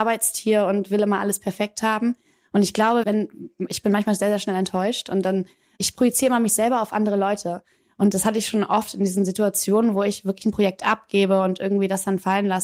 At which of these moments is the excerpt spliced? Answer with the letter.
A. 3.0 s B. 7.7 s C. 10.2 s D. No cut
A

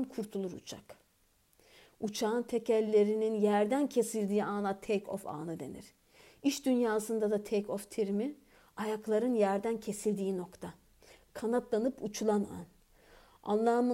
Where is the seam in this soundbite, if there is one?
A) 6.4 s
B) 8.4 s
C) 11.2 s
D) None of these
D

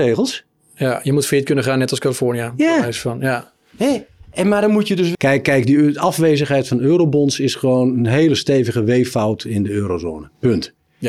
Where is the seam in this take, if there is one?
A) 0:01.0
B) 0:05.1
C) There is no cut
B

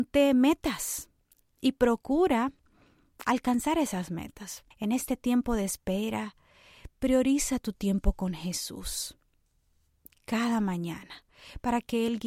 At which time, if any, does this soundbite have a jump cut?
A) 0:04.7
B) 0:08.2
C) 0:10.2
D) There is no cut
A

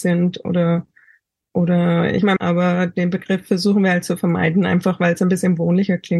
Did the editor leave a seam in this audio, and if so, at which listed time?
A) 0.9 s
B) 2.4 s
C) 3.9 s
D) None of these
B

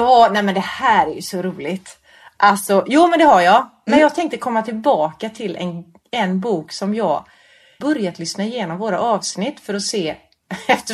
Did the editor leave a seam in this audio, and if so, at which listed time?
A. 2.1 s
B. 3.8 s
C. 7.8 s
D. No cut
C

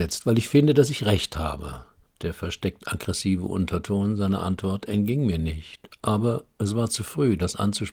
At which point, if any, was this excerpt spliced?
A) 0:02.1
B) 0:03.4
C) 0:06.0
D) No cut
A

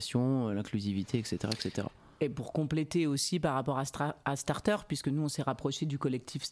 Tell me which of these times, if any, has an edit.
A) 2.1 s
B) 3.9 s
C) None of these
C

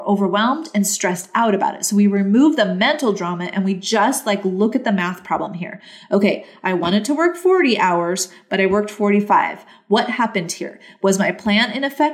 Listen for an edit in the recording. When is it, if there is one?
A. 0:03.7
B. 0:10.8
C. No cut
C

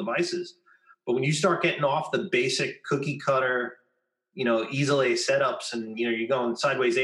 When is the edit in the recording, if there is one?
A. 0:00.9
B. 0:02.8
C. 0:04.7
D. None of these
D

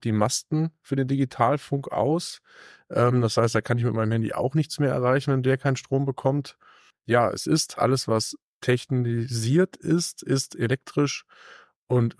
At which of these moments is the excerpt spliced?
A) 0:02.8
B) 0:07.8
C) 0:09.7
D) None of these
B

